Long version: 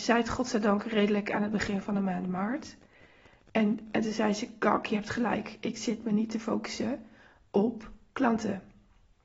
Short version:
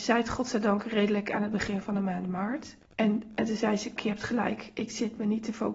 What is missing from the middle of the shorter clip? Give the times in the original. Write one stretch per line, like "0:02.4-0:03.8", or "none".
0:02.8-0:03.4
0:04.5-0:04.8